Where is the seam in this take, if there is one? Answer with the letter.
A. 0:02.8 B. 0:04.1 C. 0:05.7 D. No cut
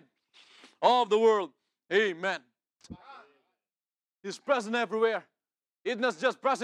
A